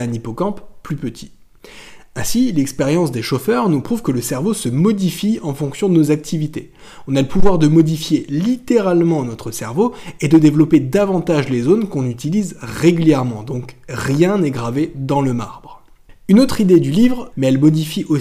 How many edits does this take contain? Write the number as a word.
one